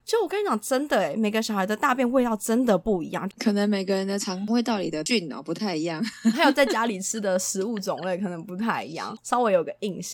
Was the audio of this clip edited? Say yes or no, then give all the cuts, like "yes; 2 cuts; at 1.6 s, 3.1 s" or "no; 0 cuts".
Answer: yes; 2 cuts; at 3.3 s, 9.2 s